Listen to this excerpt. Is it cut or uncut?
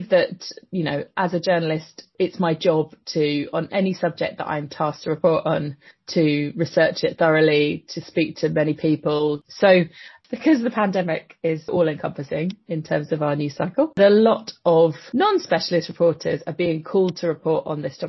cut